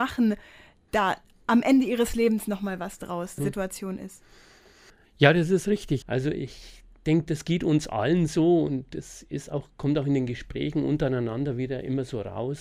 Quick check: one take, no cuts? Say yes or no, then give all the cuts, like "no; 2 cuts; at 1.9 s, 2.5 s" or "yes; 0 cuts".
no; 2 cuts; at 3.4 s, 6.0 s